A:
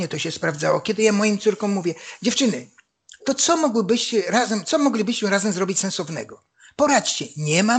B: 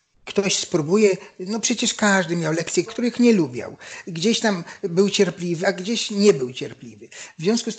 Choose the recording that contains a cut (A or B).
B